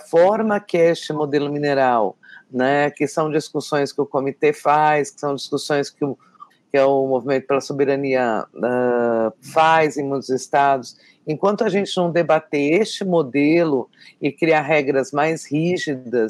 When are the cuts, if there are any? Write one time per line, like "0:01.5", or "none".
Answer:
0:06.5
0:09.3